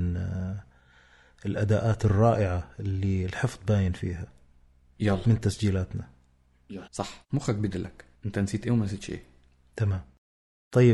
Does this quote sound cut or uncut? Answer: cut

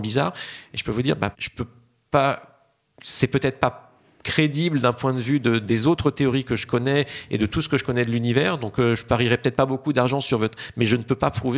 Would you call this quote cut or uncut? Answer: cut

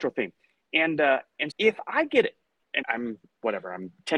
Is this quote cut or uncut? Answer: cut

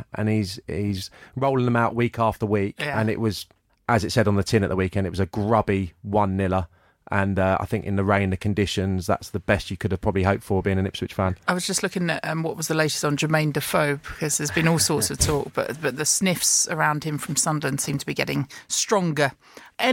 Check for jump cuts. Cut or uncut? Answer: uncut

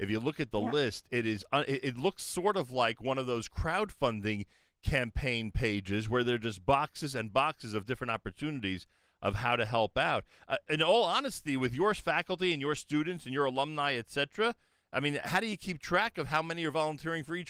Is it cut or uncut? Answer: uncut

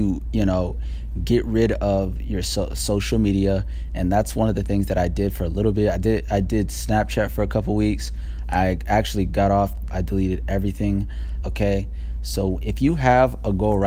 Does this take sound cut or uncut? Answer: cut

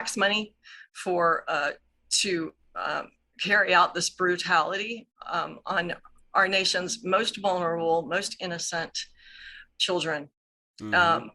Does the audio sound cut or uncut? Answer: uncut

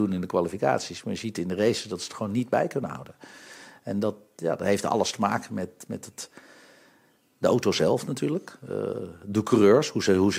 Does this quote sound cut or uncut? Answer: uncut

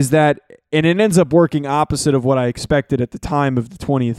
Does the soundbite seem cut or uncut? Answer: uncut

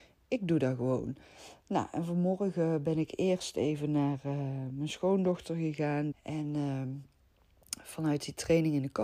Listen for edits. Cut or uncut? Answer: cut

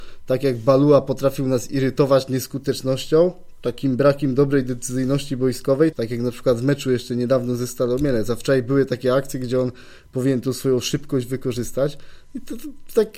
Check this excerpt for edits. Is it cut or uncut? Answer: cut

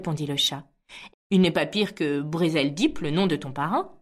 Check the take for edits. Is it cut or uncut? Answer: cut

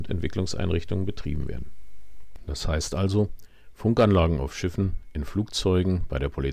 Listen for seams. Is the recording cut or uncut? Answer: uncut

